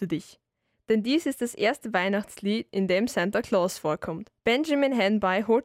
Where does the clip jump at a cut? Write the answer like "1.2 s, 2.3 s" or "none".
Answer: 4.4 s